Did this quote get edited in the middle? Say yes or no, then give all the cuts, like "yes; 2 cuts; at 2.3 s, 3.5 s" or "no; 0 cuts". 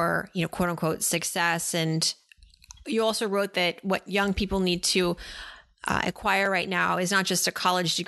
no; 0 cuts